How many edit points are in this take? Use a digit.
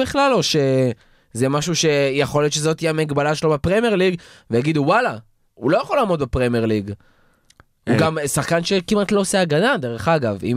1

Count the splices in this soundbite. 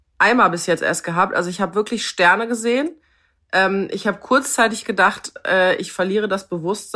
0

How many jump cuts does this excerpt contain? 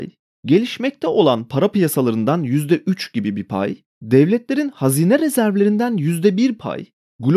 0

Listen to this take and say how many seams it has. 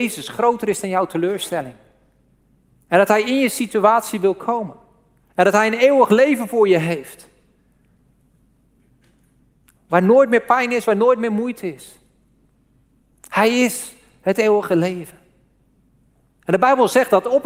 1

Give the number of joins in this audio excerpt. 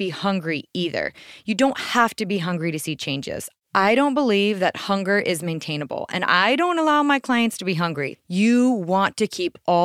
1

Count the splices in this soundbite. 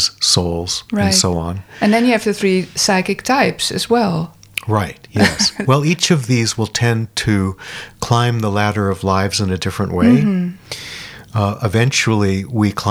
0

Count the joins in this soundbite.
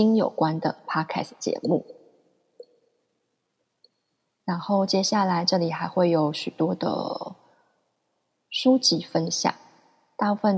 0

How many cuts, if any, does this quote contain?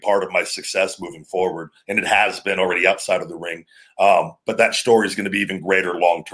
0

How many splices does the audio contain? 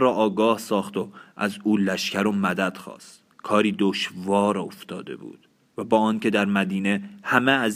1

